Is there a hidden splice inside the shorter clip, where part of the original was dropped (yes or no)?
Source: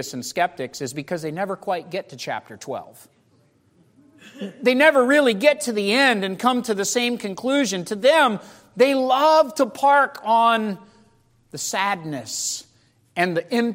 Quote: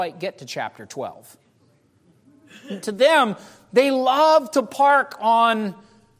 yes